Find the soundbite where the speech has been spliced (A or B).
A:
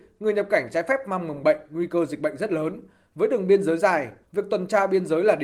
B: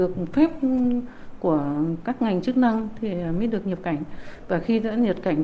A